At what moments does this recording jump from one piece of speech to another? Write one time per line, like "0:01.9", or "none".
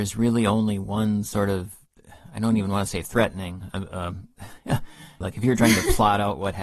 0:05.2